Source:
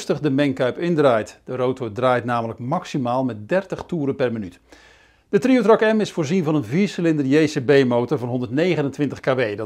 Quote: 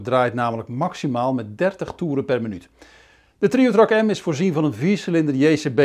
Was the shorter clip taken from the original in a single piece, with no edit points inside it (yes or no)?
yes